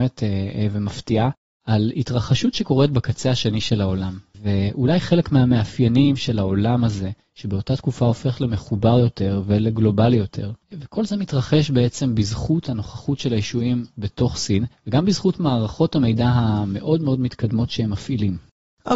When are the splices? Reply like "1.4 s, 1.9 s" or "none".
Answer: 4.3 s, 10.6 s